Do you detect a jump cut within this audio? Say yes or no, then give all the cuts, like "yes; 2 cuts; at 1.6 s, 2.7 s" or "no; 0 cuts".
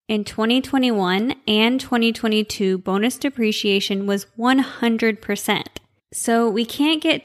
yes; 1 cut; at 6.0 s